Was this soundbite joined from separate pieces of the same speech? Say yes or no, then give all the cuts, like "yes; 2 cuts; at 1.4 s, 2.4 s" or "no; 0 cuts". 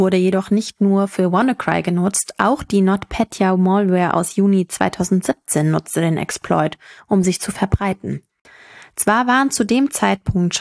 no; 0 cuts